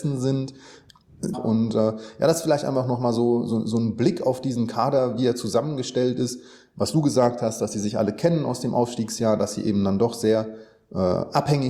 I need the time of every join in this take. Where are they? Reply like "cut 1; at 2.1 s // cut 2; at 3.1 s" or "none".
cut 1; at 1.3 s